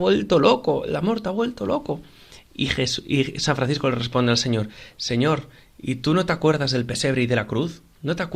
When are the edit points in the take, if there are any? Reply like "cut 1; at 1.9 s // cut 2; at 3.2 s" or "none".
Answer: none